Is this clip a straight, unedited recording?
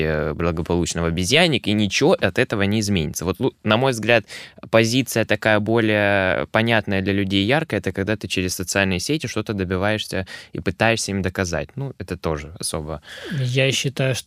yes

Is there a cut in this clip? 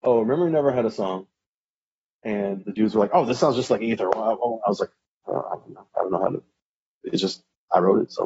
no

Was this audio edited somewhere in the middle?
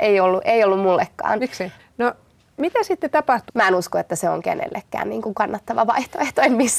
yes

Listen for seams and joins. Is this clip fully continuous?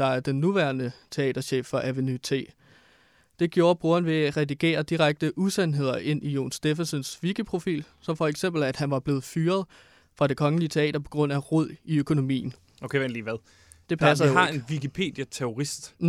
yes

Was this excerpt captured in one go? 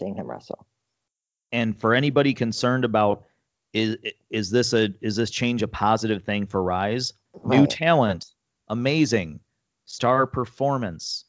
no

